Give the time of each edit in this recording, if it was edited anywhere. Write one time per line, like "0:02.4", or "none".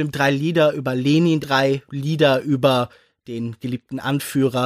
0:01.4